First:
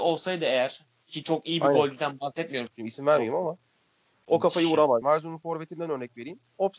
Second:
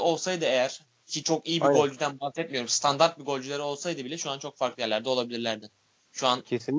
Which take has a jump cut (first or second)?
first